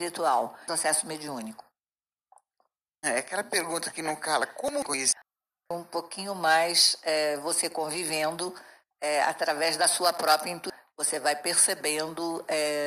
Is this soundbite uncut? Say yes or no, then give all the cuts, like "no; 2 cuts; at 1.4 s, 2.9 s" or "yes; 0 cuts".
no; 1 cut; at 3.0 s